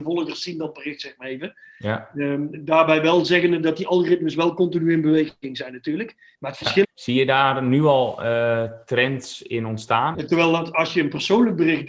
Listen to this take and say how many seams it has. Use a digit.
2